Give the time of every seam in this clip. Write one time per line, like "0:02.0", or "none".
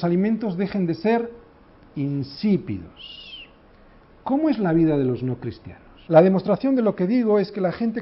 0:06.1